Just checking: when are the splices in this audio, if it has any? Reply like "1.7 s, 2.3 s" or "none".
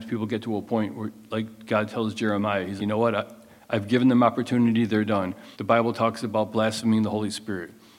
2.8 s, 5.5 s